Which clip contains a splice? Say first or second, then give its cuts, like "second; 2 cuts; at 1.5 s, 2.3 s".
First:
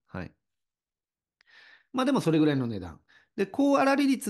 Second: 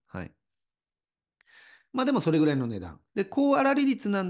second; 1 cut; at 3.1 s